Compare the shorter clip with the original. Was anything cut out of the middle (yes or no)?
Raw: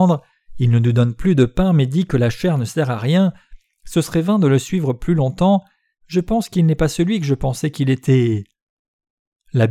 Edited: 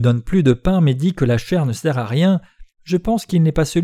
yes